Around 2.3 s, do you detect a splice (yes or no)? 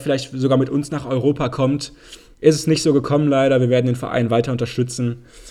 yes